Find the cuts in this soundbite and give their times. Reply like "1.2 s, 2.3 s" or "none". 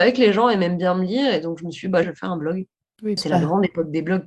2.0 s, 3.2 s